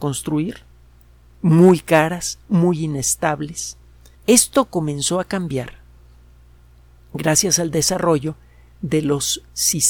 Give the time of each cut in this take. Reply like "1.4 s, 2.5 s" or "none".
4.1 s